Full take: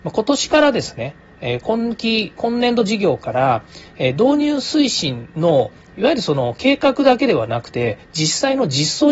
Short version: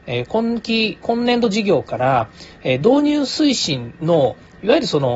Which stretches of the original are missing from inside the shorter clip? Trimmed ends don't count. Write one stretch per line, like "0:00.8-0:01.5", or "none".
none